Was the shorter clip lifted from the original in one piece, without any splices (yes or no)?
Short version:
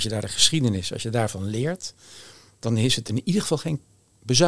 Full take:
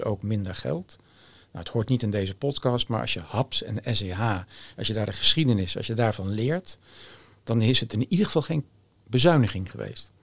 yes